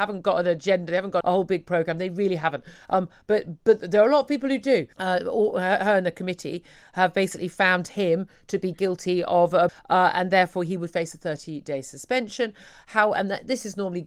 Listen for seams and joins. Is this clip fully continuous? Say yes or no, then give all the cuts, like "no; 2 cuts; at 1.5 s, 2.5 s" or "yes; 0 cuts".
no; 3 cuts; at 1.2 s, 4.9 s, 9.7 s